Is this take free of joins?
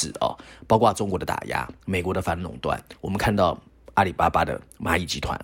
yes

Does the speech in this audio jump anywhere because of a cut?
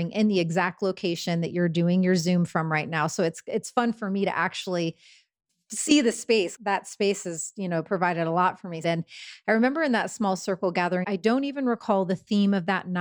yes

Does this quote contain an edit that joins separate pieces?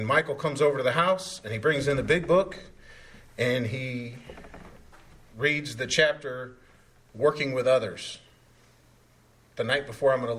no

